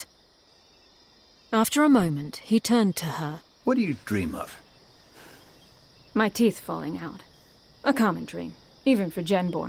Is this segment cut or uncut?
uncut